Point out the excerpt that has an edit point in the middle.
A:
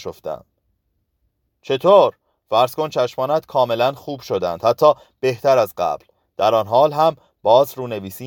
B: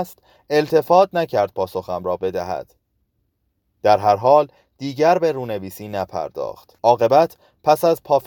B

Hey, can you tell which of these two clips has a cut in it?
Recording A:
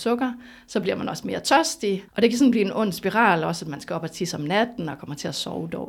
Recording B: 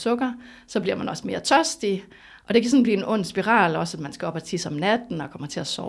A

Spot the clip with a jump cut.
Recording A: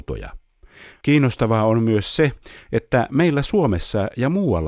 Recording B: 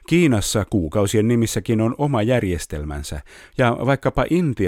A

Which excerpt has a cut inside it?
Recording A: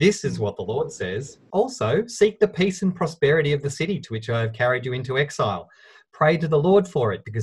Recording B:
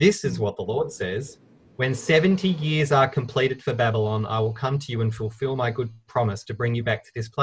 A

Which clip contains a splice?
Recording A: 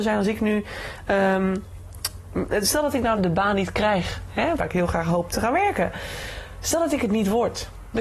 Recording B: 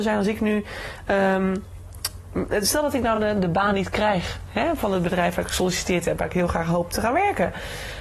A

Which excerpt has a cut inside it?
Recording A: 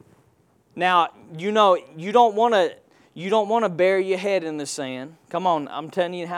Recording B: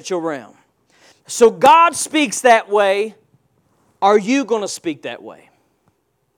B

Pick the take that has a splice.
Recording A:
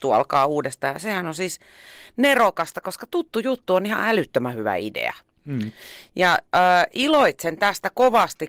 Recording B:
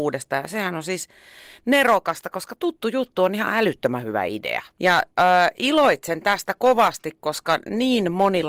B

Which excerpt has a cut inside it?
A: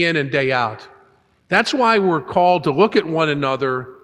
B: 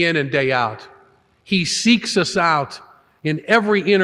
A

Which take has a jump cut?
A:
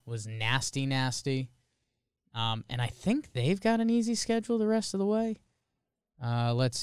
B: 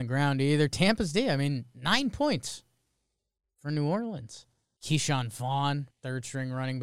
B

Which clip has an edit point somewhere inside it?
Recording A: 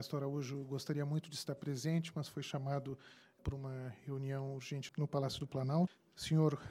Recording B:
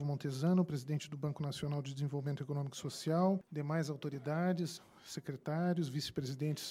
A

